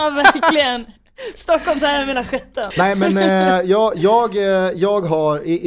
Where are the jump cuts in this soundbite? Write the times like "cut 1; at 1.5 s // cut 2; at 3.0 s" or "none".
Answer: cut 1; at 2.7 s